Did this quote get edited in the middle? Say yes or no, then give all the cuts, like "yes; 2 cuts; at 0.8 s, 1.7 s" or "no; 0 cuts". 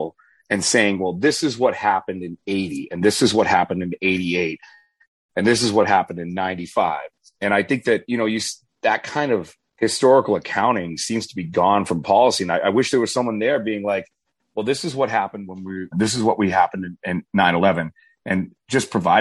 yes; 1 cut; at 15.9 s